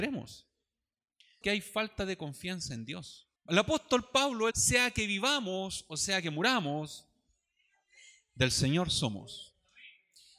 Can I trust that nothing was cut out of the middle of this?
no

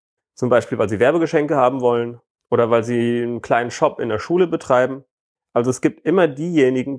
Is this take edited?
no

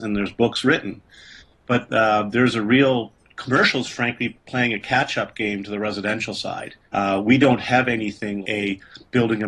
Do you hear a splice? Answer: yes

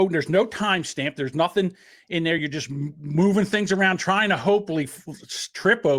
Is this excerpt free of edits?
yes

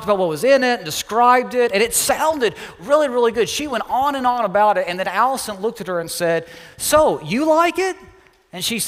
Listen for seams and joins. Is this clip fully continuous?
yes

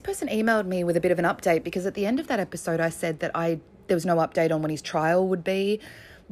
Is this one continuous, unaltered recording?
yes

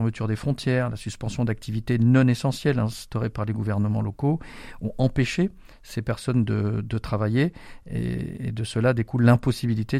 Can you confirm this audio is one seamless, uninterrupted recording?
yes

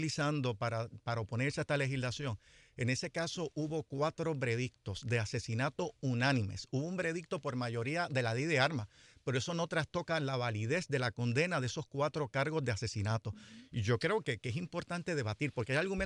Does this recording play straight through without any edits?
yes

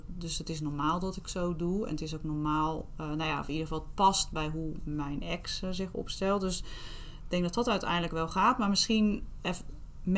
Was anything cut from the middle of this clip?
no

